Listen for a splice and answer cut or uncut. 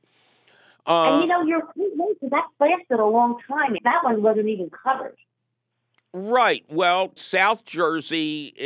cut